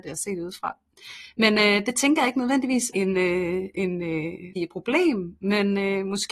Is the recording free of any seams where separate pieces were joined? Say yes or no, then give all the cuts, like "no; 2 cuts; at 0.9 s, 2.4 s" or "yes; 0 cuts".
no; 2 cuts; at 2.9 s, 4.6 s